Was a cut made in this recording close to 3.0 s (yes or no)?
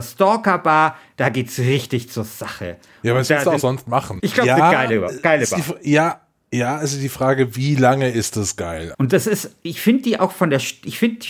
no